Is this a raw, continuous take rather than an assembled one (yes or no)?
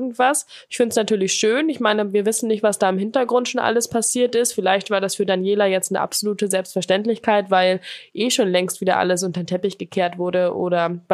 yes